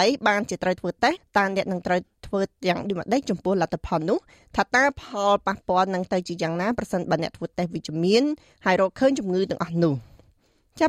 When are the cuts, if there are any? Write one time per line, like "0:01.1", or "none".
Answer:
0:01.2